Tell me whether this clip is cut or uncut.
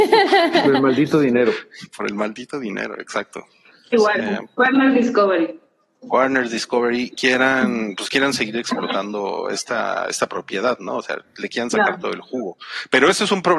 cut